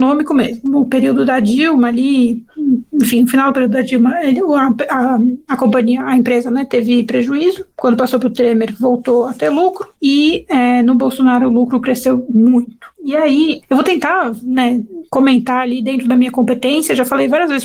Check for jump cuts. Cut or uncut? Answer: uncut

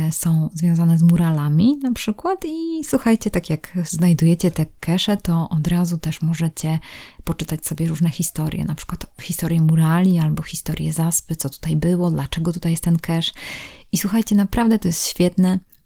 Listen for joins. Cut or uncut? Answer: uncut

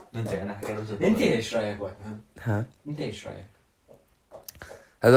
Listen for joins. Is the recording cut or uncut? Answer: uncut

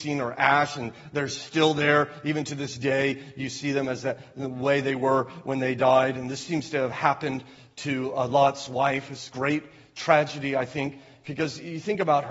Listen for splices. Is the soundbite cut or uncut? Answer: uncut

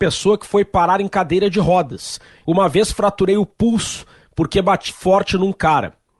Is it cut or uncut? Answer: cut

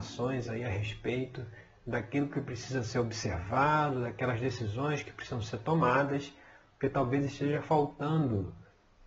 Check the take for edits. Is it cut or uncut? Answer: uncut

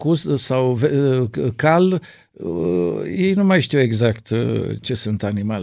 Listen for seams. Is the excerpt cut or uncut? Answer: uncut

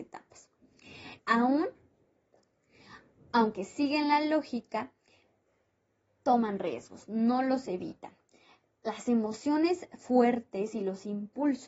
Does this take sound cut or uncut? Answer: cut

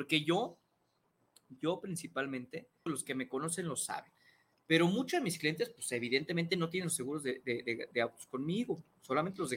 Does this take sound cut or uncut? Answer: cut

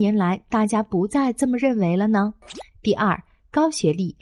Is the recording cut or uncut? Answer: cut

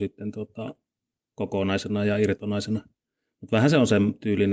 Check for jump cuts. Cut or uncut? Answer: uncut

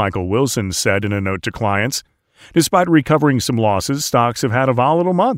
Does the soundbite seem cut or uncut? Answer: uncut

